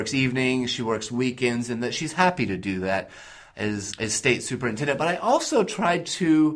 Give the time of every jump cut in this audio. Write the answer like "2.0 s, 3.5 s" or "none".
3.9 s